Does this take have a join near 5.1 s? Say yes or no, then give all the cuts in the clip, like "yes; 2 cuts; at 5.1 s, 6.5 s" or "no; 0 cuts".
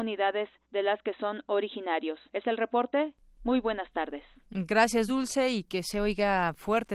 no; 0 cuts